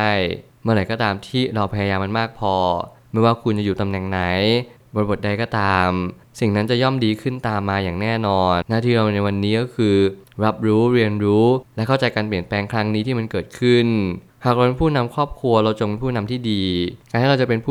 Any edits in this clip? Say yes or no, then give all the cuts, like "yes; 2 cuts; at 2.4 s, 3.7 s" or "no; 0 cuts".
yes; 1 cut; at 8.6 s